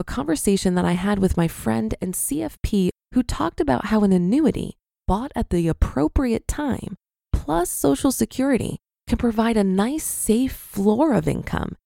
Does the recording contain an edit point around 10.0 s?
no; 1 cut; at 3.0 s

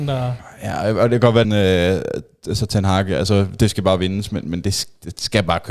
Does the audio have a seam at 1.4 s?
yes; 1 cut; at 1.4 s

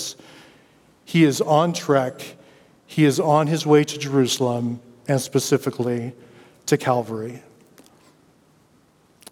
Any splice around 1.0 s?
yes; 1 cut; at 1.0 s

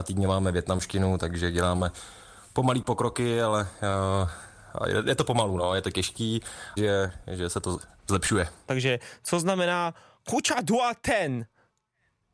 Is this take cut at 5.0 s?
no; 2 cuts; at 6.8 s, 8.7 s

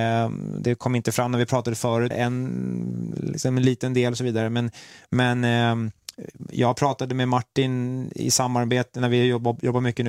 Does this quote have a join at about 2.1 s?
yes; 1 cut; at 2.1 s

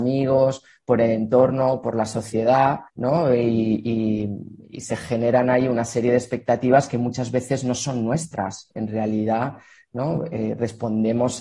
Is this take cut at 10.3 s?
no; 1 cut; at 2.9 s

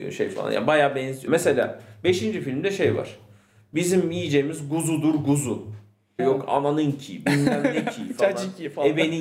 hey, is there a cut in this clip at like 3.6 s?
no; 2 cuts; at 1.3 s, 6.2 s

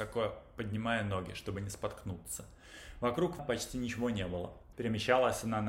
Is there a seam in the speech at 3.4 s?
yes; 2 cuts; at 3.4 s, 4.7 s

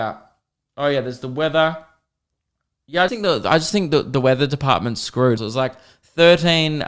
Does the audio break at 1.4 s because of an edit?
no; 2 cuts; at 3.1 s, 5.4 s

